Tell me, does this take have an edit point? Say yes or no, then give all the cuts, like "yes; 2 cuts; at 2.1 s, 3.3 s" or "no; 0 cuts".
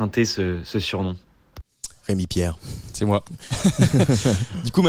no; 0 cuts